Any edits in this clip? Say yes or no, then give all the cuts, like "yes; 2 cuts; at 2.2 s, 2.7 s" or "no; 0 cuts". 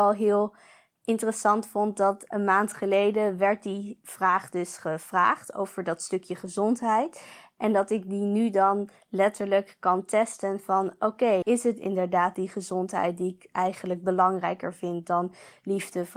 yes; 1 cut; at 11.4 s